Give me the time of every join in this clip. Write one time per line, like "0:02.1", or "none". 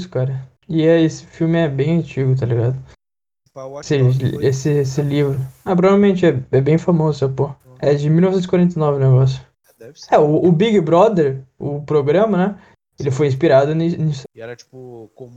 0:07.6
0:14.2

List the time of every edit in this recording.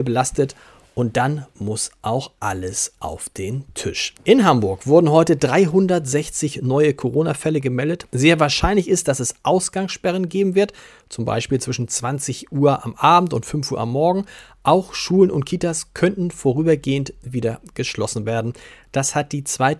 0:04.2
0:08.1

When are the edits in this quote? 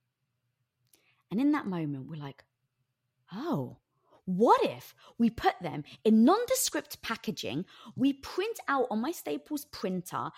none

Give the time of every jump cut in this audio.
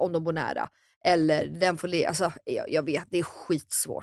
none

